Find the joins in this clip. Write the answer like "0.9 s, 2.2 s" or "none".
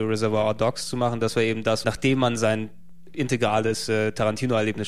1.8 s, 3.1 s

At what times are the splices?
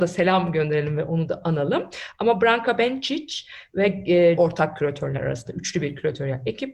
4.4 s

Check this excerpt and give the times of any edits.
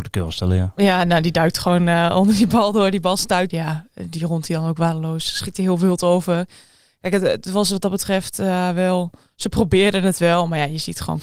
3.5 s

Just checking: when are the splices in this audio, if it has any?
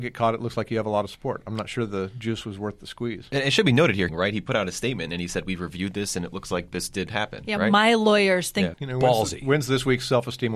4.1 s, 8.7 s

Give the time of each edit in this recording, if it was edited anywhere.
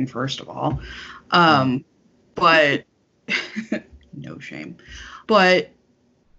5.2 s

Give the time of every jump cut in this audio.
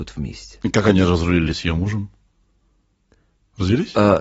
none

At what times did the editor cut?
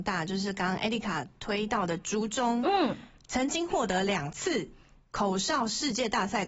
none

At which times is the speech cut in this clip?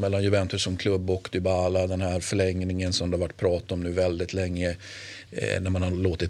5.3 s

